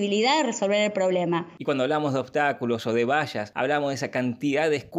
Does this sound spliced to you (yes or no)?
no